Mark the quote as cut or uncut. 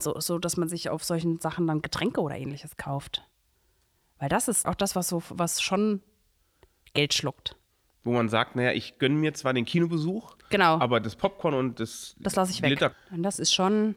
cut